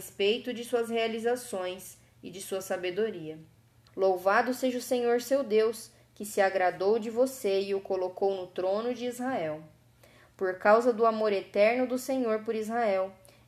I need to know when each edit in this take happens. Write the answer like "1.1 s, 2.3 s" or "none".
3.9 s